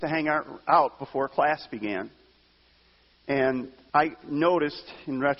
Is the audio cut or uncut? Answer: cut